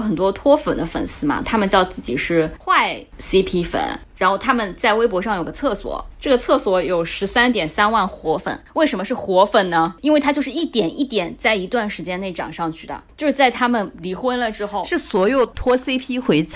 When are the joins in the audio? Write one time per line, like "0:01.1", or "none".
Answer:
0:01.4